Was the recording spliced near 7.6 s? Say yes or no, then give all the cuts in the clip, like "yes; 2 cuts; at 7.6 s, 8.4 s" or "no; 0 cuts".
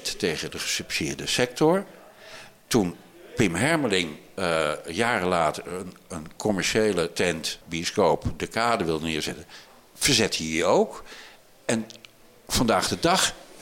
yes; 1 cut; at 7.6 s